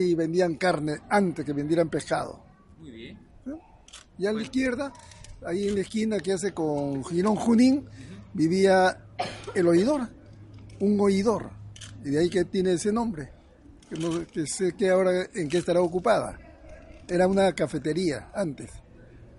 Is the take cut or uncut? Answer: uncut